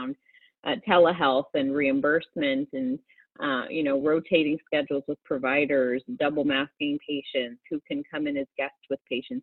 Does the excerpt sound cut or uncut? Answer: uncut